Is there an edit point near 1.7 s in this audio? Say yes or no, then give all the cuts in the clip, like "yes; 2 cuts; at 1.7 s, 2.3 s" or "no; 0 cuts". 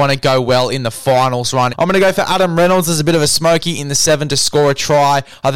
yes; 1 cut; at 1.7 s